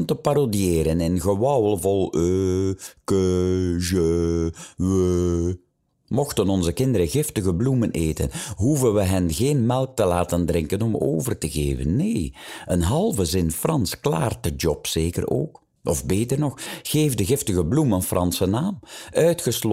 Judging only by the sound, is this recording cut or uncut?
cut